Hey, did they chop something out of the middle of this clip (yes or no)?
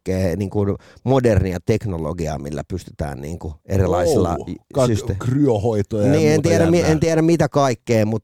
no